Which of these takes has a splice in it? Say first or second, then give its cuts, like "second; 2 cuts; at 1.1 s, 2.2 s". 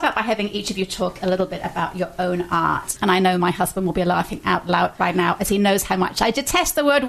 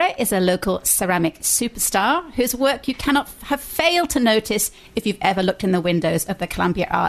first; 1 cut; at 3.0 s